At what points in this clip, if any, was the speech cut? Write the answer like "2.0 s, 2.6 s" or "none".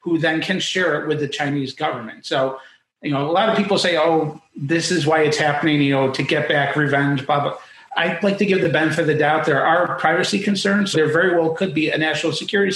10.9 s